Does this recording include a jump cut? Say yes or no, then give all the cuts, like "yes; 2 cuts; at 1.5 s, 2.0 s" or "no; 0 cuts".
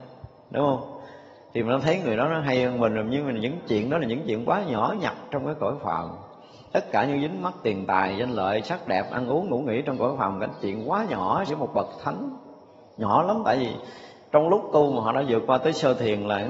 yes; 1 cut; at 11.5 s